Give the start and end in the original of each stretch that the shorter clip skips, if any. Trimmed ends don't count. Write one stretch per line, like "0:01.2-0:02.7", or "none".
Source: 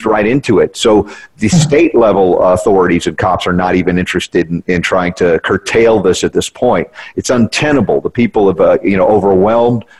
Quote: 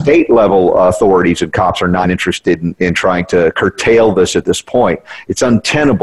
0:03.7-0:03.9